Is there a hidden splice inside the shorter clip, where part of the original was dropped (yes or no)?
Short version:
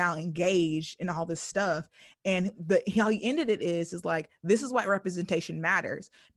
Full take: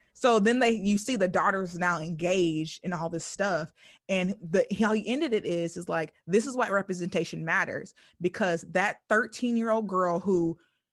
no